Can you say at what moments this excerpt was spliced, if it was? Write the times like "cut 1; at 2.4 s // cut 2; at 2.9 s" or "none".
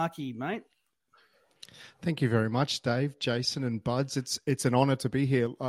none

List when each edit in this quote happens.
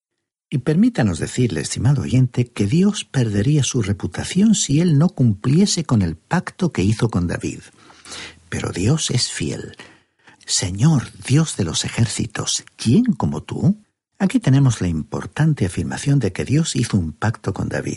cut 1; at 10.3 s // cut 2; at 14.1 s

